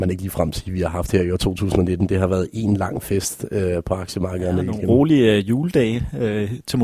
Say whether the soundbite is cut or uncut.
uncut